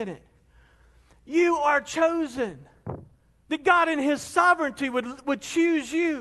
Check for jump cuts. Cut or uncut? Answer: cut